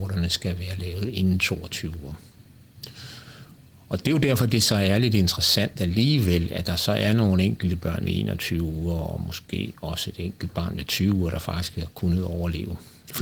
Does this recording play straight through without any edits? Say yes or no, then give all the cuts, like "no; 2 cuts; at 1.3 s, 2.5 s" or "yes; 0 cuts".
yes; 0 cuts